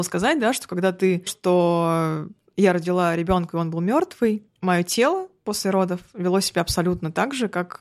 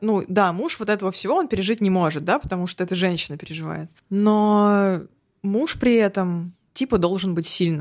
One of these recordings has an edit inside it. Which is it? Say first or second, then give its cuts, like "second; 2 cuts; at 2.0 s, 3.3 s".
first; 1 cut; at 1.3 s